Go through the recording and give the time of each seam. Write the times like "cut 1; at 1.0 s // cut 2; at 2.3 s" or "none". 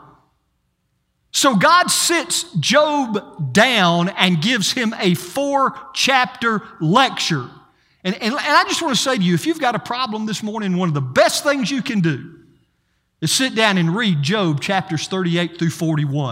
cut 1; at 8.2 s